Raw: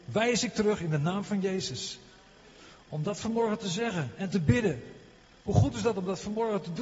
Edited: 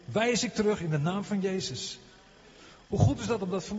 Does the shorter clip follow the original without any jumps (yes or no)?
no